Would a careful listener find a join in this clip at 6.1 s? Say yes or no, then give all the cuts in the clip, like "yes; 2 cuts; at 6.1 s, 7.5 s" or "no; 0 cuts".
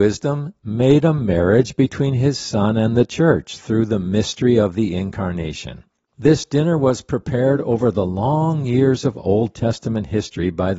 yes; 1 cut; at 6.1 s